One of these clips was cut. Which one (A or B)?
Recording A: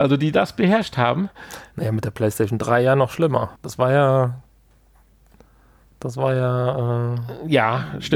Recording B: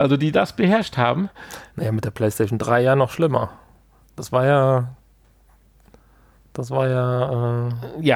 A